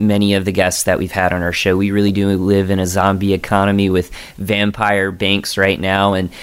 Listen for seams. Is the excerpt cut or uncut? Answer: uncut